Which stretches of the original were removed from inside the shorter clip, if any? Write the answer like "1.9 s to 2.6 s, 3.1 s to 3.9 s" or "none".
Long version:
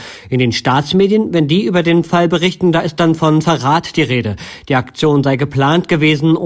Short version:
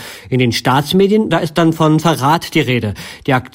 1.3 s to 2.7 s